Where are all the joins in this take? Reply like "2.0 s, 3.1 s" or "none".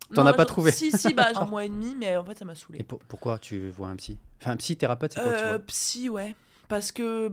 1.3 s